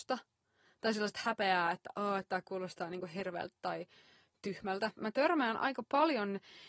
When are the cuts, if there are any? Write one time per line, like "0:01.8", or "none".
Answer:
0:05.0